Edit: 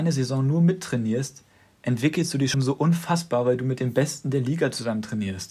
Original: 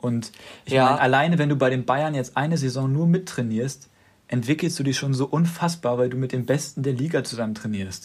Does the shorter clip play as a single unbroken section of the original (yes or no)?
no